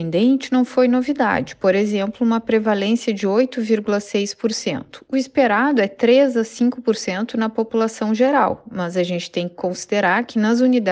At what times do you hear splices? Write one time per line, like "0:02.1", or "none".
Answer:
none